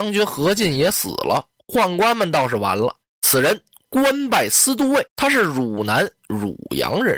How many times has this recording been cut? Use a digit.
2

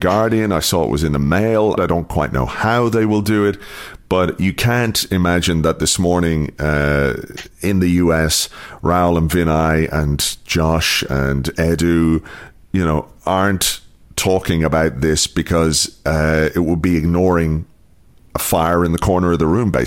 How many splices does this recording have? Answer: 1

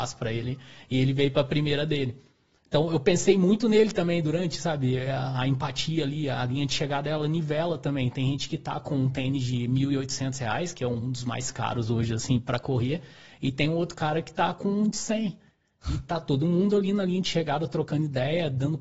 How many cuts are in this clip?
0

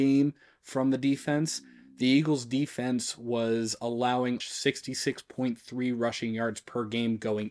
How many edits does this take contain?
1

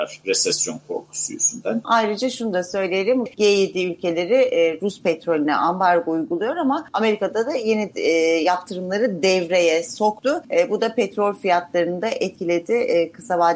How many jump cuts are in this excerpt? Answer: 2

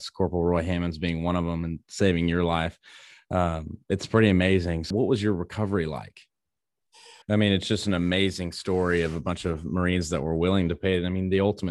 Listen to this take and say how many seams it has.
2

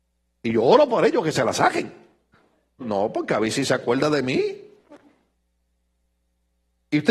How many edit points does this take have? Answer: 1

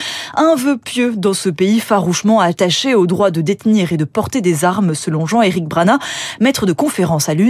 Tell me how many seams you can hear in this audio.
0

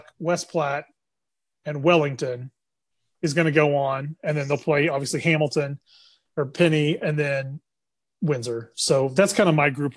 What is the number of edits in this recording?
0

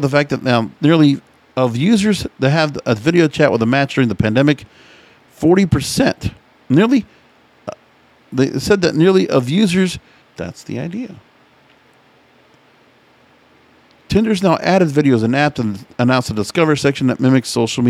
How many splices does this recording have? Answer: 1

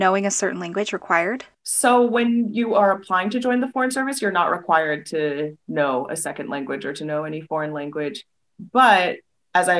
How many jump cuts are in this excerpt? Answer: 1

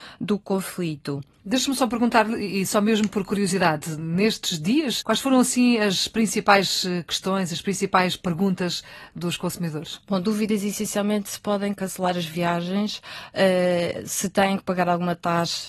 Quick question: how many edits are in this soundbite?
1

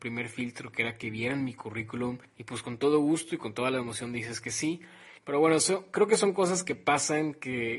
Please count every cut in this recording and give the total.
2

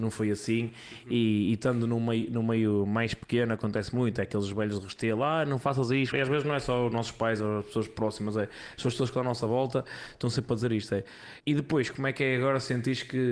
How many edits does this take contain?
2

